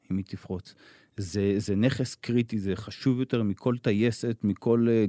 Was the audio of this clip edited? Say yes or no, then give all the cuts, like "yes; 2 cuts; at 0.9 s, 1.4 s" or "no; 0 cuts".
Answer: no; 0 cuts